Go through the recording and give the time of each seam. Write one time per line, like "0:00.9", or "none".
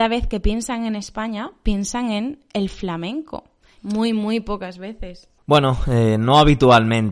0:03.8
0:05.4